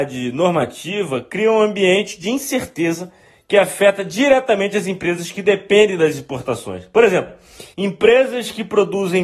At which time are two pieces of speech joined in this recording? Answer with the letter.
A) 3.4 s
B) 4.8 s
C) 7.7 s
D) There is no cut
C